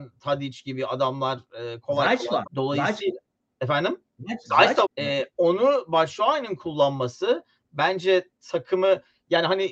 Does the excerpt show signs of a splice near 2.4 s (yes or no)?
yes